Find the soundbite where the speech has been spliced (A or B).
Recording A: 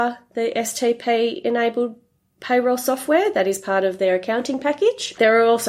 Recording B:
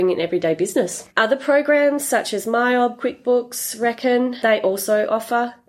B